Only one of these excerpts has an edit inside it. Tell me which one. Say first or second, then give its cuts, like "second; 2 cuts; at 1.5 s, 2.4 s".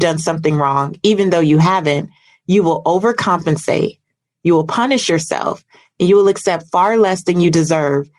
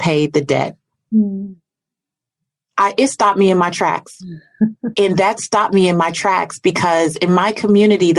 second; 2 cuts; at 0.9 s, 4.9 s